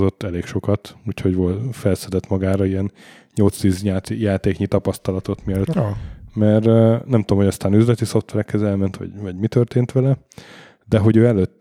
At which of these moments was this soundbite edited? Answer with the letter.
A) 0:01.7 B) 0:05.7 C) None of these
B